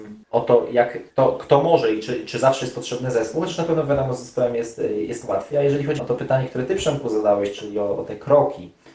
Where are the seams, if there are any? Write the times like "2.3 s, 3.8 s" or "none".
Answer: 6.0 s